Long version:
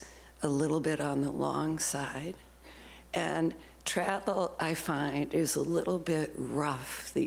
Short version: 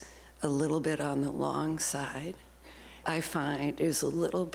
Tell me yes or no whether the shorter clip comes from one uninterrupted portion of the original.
no